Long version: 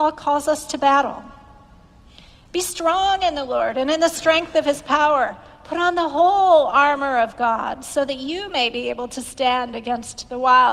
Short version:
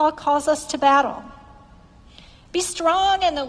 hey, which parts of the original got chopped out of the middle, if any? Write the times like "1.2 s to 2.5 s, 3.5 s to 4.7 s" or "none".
none